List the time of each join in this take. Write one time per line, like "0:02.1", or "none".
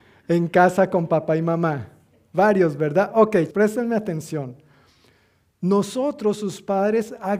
0:03.5